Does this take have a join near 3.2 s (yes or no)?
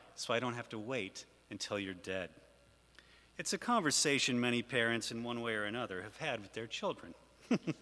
no